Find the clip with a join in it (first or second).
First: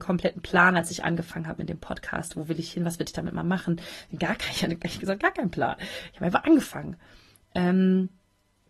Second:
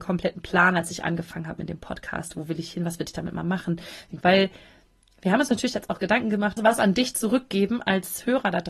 second